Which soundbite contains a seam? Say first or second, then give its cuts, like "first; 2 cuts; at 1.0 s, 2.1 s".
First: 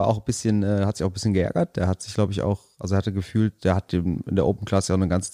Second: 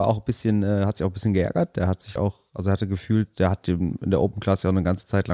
second; 1 cut; at 2.2 s